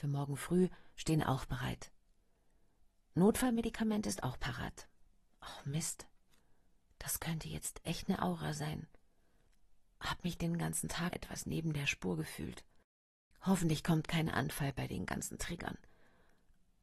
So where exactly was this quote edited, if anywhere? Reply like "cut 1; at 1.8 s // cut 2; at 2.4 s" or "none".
cut 1; at 11.1 s